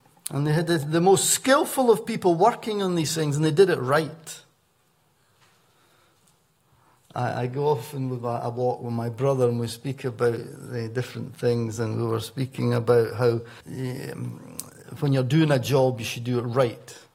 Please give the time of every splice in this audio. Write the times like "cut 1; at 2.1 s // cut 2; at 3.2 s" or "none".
cut 1; at 13.6 s